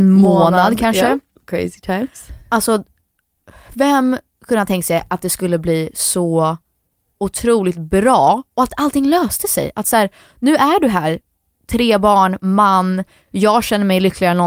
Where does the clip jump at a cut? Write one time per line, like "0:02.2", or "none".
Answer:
none